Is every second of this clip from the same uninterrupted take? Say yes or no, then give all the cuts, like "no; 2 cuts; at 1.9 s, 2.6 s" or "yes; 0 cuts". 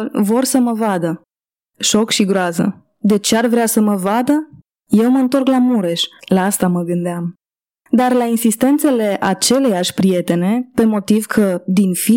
no; 1 cut; at 6.2 s